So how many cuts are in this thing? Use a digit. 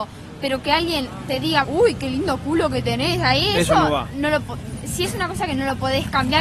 1